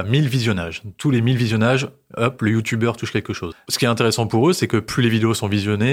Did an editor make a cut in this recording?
yes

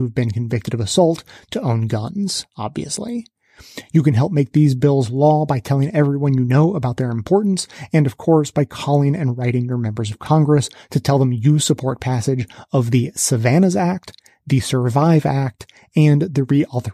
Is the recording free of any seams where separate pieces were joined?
yes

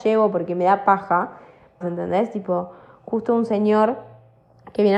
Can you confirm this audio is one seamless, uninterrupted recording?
no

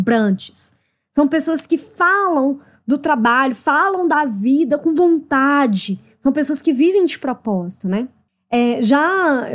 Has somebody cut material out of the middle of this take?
no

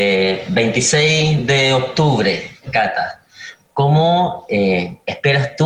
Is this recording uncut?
yes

